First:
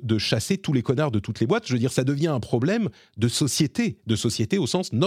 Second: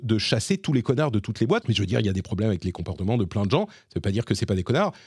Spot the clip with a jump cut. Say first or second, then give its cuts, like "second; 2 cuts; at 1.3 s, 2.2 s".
second; 1 cut; at 1.6 s